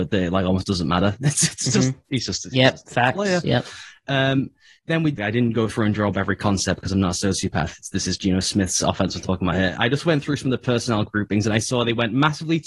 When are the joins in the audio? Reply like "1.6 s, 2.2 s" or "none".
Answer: 5.2 s

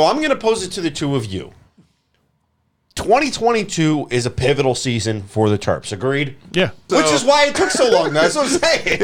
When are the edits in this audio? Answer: 6.9 s

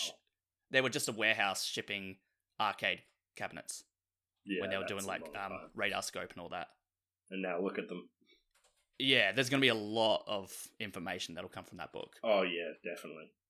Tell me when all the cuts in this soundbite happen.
none

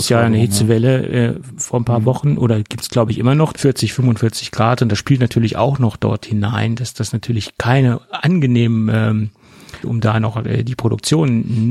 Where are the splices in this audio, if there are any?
3.5 s, 9.8 s

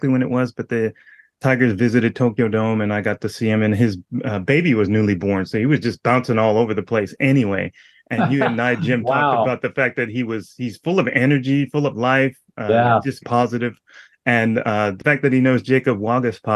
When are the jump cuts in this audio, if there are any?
13.2 s

